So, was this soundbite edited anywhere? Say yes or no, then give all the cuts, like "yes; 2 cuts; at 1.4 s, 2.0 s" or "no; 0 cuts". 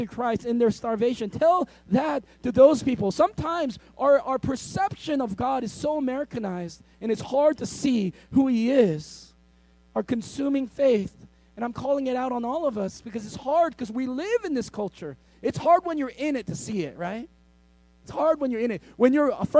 no; 0 cuts